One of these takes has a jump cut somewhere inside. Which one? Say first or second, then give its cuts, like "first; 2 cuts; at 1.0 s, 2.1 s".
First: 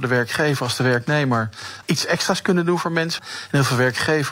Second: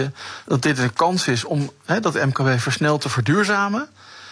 first; 2 cuts; at 1.8 s, 3.2 s